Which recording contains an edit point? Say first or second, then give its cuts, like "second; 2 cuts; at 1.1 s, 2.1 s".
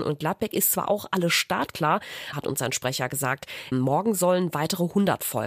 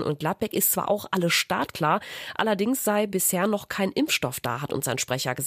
first; 2 cuts; at 2.3 s, 3.7 s